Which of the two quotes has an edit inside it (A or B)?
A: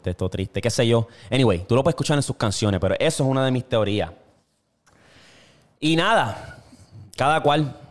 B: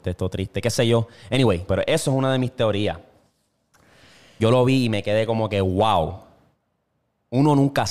B